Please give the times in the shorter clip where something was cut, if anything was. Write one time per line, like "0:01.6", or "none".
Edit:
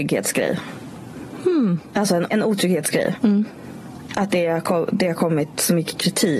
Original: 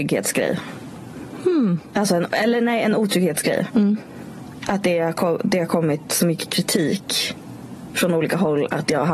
0:02.3